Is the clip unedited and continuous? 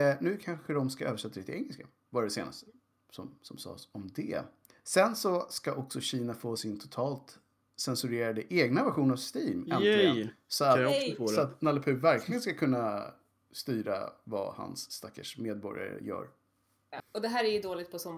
no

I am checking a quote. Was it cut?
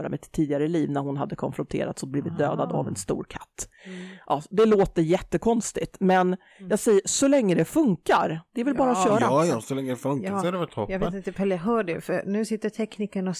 no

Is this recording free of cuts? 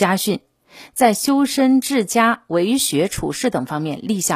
yes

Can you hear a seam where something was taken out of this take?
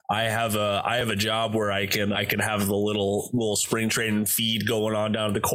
yes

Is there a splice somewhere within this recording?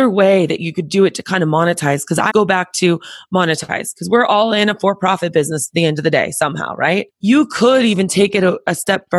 yes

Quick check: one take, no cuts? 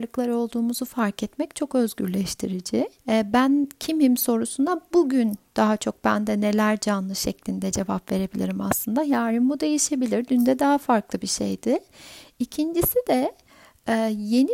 no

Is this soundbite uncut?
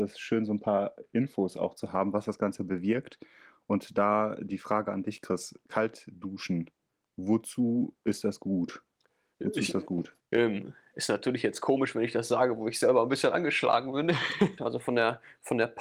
no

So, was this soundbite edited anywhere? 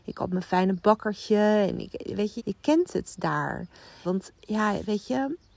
yes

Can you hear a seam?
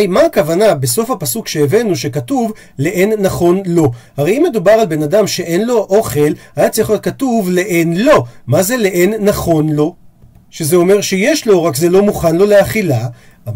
no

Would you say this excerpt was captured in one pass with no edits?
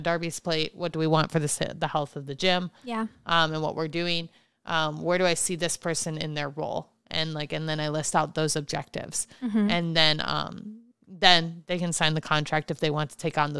yes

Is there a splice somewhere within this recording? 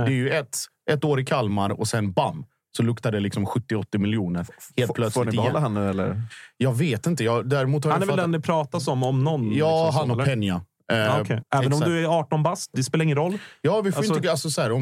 yes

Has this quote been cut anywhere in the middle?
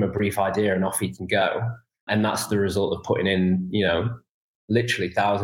no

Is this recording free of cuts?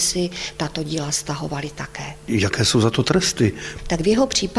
yes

